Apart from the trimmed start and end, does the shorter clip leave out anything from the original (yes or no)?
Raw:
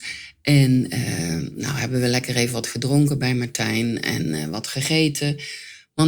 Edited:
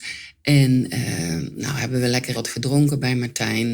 yes